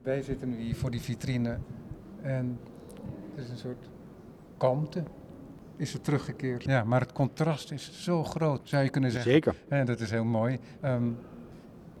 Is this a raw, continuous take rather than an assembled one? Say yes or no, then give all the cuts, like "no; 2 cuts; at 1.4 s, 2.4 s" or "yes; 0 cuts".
no; 3 cuts; at 6.7 s, 8.6 s, 10.8 s